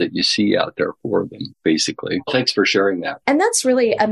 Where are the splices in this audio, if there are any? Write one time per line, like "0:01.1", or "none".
0:01.5
0:03.2